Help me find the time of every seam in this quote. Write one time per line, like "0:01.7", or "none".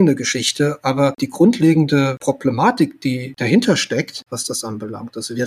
0:04.3